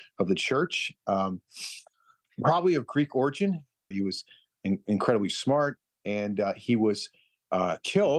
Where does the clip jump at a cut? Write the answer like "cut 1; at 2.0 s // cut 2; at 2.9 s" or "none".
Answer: cut 1; at 3.9 s